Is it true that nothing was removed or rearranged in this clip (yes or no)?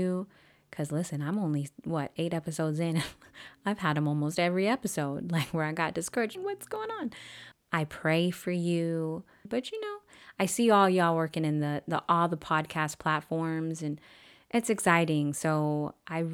no